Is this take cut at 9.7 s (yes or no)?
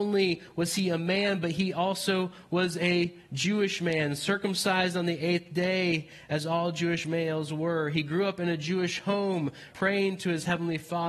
yes